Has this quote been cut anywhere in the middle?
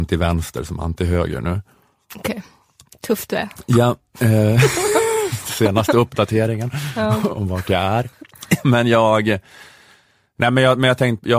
no; 0 cuts

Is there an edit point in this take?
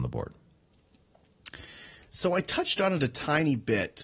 no; 0 cuts

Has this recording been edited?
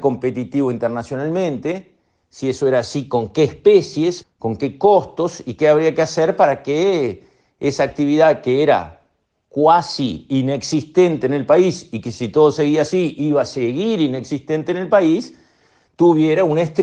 yes; 1 cut; at 4.2 s

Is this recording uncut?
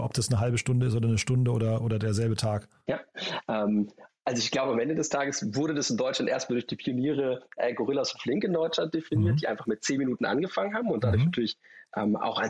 yes; 0 cuts

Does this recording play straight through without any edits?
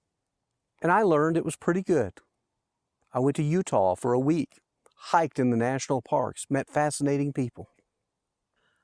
yes; 0 cuts

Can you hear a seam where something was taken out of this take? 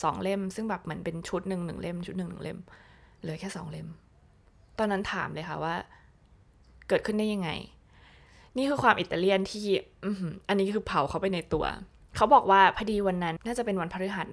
yes; 1 cut; at 13.4 s

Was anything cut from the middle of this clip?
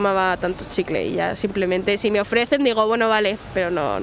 no; 0 cuts

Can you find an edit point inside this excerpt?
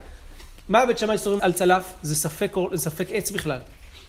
yes; 1 cut; at 1.4 s

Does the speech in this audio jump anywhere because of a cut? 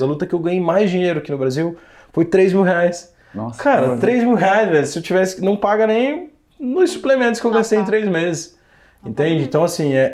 no; 0 cuts

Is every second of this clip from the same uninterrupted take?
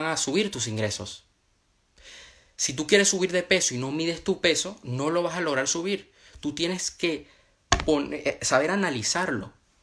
yes; 0 cuts

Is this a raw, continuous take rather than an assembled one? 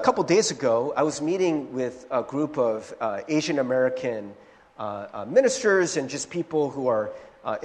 yes; 0 cuts

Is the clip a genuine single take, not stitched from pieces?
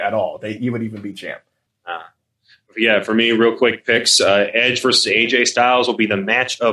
no; 1 cut; at 1.7 s

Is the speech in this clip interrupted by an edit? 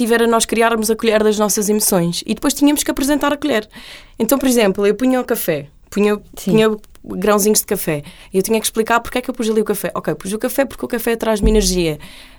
no; 0 cuts

